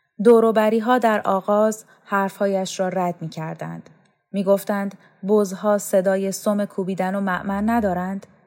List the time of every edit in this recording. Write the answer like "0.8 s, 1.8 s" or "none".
none